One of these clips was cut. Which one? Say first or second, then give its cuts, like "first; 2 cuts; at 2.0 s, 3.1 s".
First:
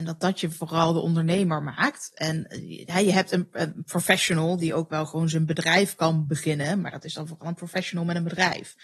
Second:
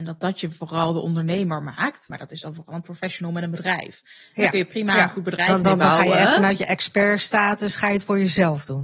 second; 1 cut; at 2.1 s